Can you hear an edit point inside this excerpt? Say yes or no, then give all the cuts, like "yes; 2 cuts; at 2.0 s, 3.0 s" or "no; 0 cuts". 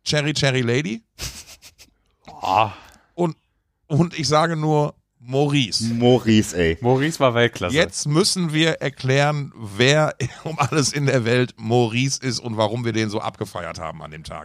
no; 0 cuts